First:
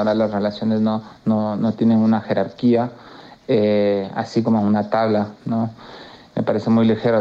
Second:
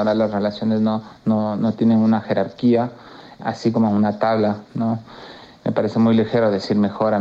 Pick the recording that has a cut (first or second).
second